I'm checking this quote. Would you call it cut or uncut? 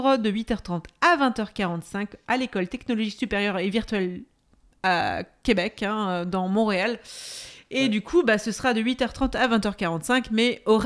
uncut